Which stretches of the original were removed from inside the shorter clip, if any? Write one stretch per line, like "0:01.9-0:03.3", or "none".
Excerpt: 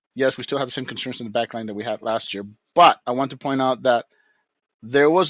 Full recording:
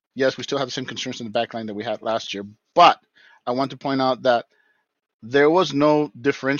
0:03.0-0:03.4